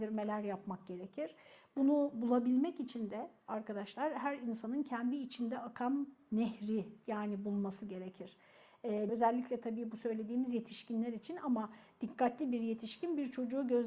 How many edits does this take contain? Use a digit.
1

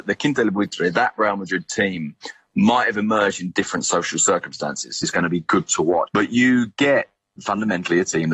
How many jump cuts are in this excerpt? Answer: 2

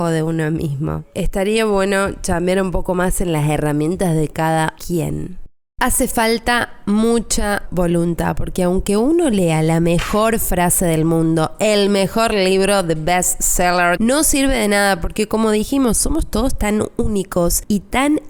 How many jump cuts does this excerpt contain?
1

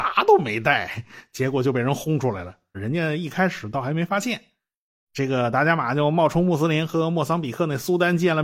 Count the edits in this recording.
1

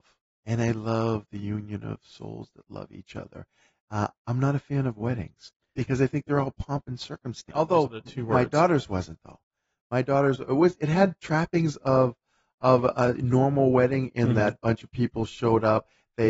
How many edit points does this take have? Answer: 1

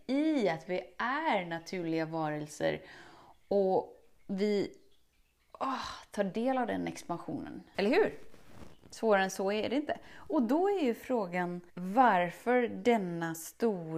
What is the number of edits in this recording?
2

